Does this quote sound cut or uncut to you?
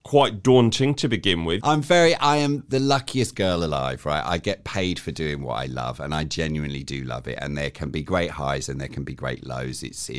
cut